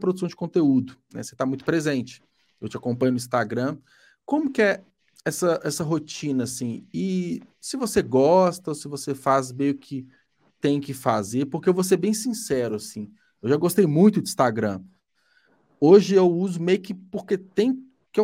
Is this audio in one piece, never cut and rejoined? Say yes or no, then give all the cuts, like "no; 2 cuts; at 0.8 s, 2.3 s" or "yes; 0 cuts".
yes; 0 cuts